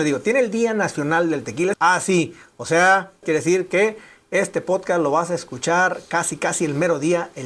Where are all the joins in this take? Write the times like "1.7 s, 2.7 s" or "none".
1.7 s, 3.2 s

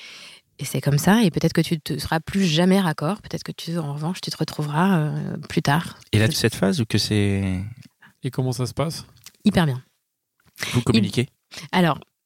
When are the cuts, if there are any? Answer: 6.3 s, 8.1 s

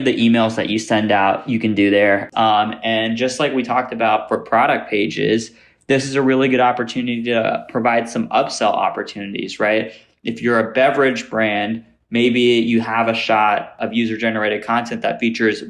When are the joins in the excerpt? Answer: 2.3 s

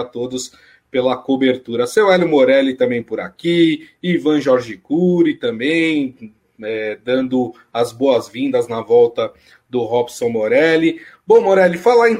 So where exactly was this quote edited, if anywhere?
none

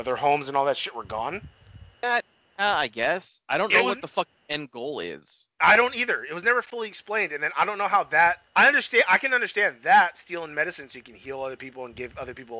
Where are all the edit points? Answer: 2.0 s, 8.5 s

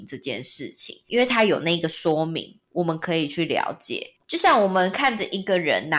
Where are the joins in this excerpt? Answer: none

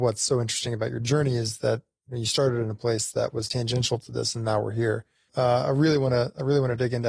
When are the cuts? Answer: 5.3 s

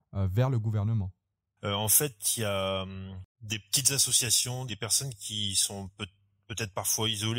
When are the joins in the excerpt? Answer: 1.6 s, 4.7 s

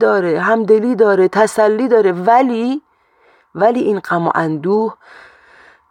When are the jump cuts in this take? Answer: none

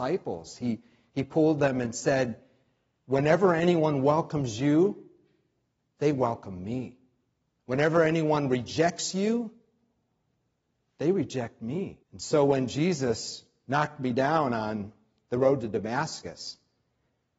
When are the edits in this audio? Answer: 7.6 s, 12.0 s

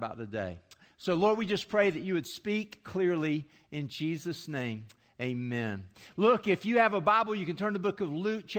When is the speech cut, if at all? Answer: none

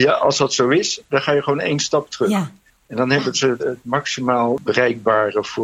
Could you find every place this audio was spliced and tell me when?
3.6 s

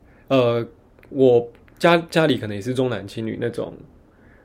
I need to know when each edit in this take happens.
none

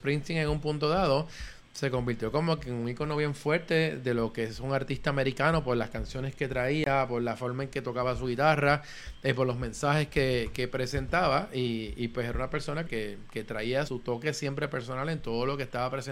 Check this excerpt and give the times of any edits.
12.9 s, 13.9 s

